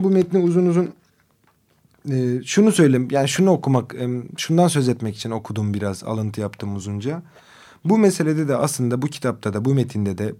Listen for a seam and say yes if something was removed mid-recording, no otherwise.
no